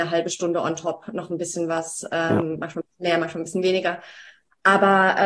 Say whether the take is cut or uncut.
uncut